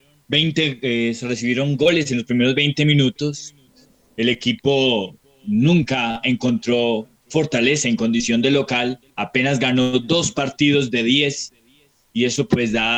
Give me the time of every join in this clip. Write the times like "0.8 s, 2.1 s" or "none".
9.1 s